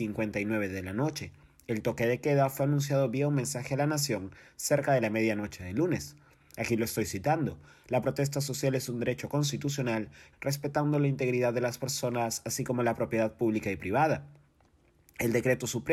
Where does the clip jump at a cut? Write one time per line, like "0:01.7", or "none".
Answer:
0:06.4
0:10.3